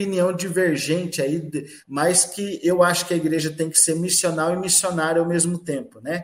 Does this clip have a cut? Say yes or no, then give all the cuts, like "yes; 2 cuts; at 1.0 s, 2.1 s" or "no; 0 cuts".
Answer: yes; 1 cut; at 1.8 s